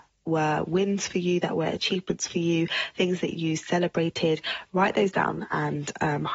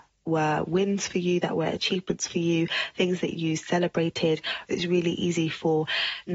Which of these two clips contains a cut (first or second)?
second